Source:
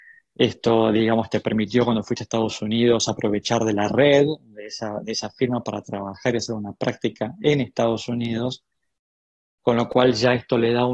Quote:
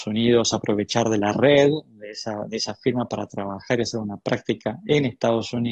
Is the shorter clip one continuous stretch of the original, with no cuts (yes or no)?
yes